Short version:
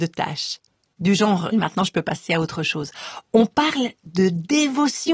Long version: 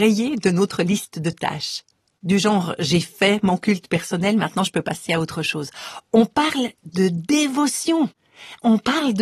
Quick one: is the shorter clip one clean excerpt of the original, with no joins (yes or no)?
no